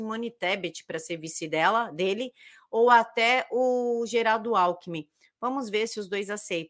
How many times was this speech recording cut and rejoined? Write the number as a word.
zero